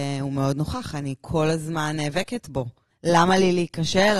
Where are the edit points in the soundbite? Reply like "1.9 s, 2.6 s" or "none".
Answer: 2.9 s